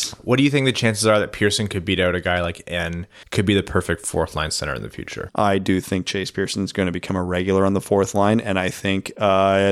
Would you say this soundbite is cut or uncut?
cut